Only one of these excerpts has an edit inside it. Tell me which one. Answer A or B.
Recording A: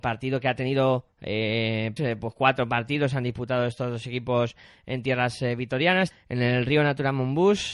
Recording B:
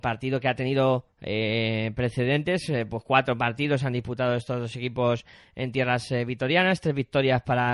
A